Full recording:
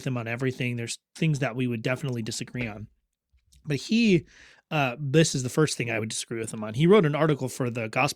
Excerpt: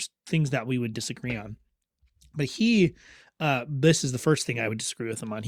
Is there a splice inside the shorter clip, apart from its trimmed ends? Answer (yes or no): yes